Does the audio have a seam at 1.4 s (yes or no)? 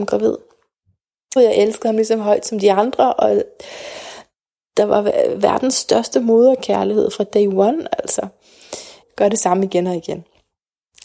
yes